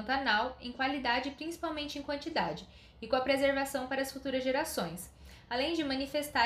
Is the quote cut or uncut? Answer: uncut